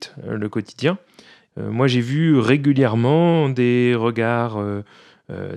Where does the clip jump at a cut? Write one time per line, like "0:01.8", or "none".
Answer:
0:01.5